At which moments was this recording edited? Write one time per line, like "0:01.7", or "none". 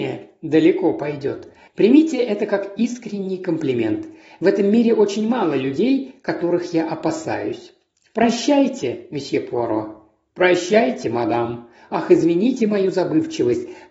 0:01.7